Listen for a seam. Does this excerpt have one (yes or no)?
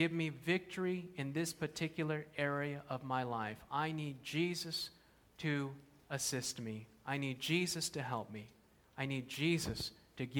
no